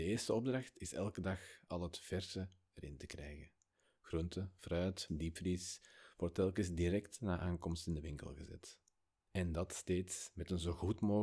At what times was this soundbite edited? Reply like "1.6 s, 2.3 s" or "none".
5.1 s, 9.3 s